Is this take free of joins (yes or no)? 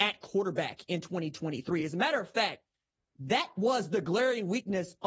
yes